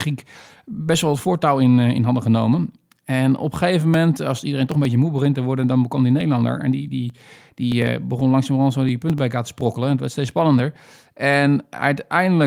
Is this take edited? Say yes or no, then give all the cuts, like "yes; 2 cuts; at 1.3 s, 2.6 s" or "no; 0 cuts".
no; 0 cuts